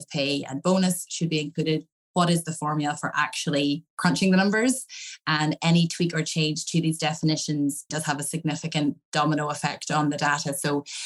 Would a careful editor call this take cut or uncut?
cut